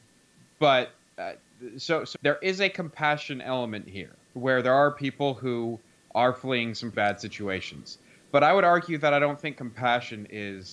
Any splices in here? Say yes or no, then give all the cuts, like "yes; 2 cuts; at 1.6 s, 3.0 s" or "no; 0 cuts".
yes; 3 cuts; at 2.1 s, 4.2 s, 6.9 s